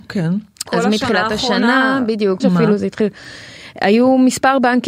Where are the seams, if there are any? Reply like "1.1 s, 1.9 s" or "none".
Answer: 2.4 s